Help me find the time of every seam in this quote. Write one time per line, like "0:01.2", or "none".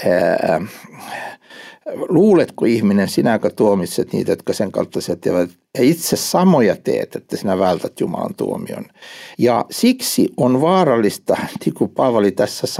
0:09.3